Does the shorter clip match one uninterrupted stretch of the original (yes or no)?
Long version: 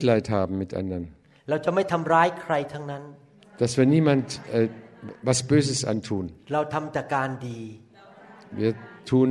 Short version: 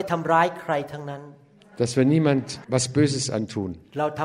no